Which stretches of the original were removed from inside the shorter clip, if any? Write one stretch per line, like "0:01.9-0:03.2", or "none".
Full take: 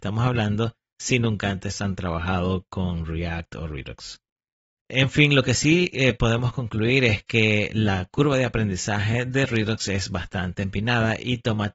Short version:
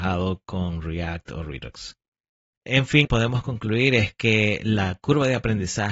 0:05.3-0:06.1

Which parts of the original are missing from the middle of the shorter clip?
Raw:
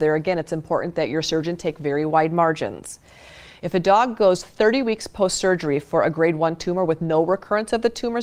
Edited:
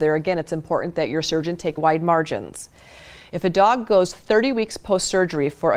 0:01.8-0:02.1

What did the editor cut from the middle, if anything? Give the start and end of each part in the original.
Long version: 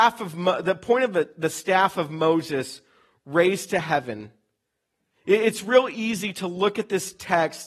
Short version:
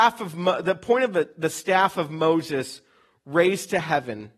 none

